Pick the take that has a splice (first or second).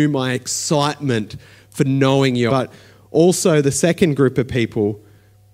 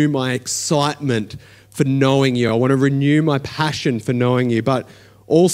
first